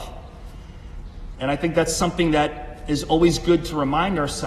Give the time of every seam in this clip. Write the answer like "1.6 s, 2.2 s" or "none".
1.3 s